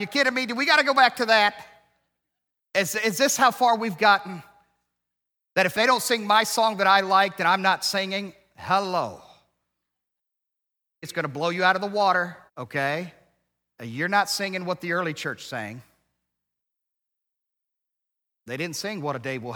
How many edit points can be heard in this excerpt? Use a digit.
2